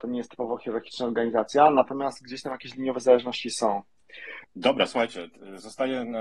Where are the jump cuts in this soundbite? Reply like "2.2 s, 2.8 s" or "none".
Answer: 4.4 s